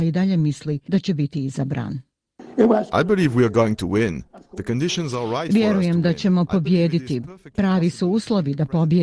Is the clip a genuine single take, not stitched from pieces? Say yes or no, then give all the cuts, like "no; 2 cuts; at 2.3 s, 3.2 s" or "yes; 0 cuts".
yes; 0 cuts